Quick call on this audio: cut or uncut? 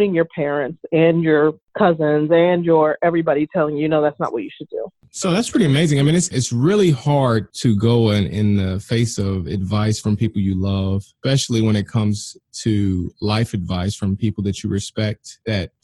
uncut